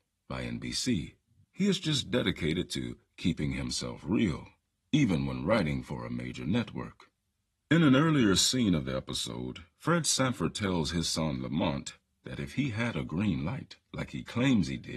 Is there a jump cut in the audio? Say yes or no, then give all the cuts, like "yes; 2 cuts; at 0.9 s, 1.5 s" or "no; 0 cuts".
yes; 1 cut; at 1.4 s